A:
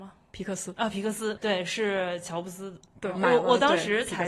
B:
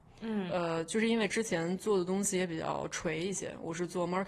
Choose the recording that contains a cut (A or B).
A